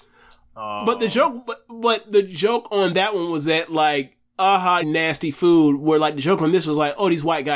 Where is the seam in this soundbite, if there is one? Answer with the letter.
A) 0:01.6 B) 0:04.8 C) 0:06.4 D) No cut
B